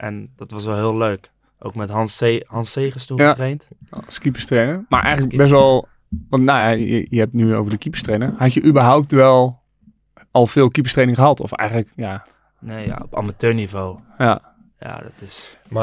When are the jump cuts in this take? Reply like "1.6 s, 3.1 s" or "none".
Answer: none